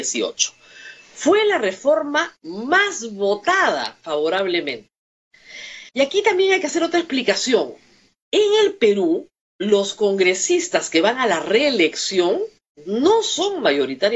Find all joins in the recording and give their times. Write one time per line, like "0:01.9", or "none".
0:05.9